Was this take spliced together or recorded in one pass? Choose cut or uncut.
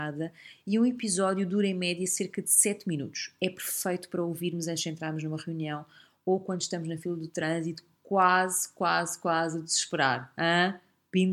uncut